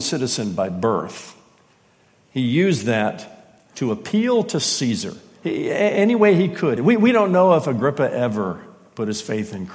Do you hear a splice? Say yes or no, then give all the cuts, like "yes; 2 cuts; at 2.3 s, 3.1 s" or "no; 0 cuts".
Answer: yes; 1 cut; at 6.8 s